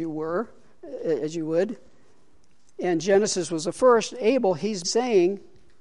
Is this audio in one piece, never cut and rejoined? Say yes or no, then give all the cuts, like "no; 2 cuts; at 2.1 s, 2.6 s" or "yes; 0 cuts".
no; 1 cut; at 4.8 s